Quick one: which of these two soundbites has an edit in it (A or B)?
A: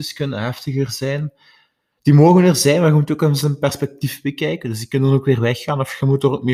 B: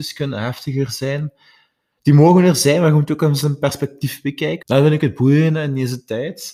B